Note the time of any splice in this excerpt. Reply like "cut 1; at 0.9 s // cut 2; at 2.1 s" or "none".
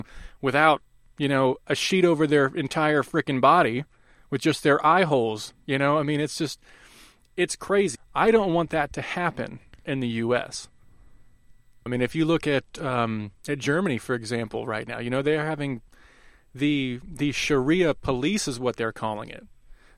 cut 1; at 8.0 s // cut 2; at 11.9 s